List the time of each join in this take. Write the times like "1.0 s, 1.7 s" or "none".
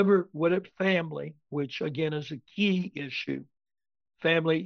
none